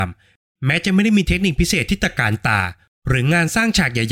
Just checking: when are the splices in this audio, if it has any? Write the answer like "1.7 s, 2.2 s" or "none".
none